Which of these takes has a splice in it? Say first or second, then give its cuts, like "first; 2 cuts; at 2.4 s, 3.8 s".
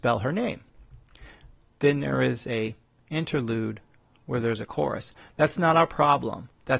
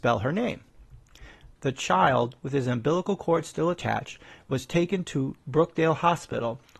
second; 1 cut; at 1.6 s